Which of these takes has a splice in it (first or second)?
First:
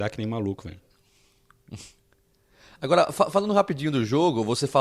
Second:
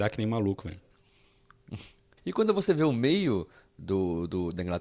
second